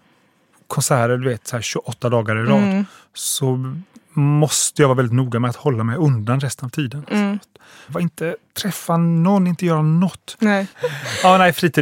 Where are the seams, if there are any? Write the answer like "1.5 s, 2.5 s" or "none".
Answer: 7.9 s, 10.7 s